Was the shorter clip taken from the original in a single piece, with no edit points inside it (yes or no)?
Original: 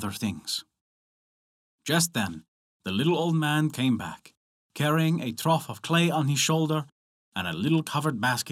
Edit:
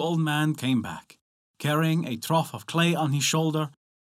yes